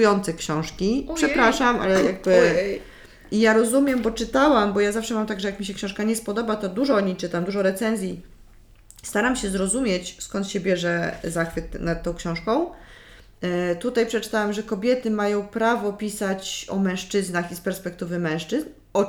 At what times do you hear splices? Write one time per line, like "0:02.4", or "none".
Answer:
none